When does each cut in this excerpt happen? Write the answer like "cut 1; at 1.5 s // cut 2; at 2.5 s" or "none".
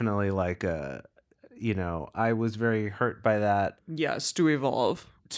cut 1; at 3.8 s